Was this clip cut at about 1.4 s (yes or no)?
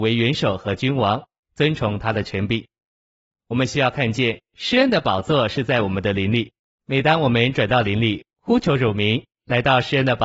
yes